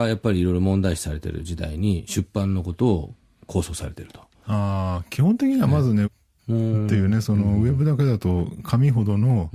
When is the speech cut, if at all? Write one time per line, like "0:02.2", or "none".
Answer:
0:04.4
0:06.0